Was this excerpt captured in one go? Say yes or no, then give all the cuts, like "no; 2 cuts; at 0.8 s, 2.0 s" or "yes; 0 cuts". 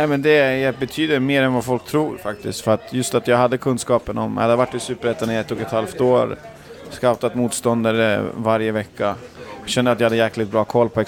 yes; 0 cuts